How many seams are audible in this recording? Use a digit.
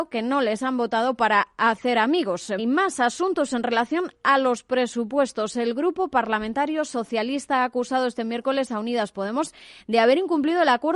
1